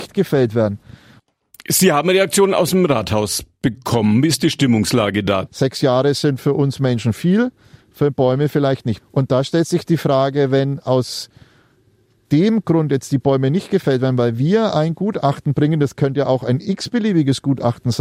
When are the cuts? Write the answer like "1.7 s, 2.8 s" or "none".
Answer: 5.4 s, 9.0 s